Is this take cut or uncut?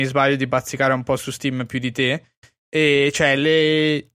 uncut